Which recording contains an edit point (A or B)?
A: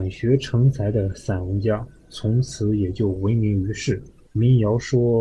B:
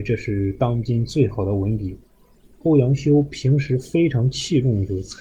A